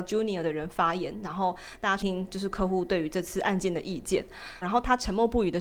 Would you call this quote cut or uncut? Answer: cut